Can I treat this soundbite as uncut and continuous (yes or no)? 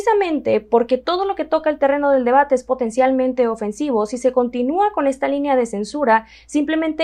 yes